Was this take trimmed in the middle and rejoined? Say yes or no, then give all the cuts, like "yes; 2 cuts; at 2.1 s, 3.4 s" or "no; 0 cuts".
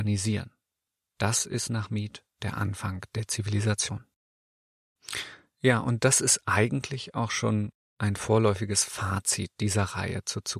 yes; 1 cut; at 2.3 s